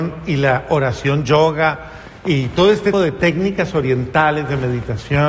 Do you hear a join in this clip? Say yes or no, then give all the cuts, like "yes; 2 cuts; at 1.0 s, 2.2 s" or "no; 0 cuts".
yes; 1 cut; at 2.9 s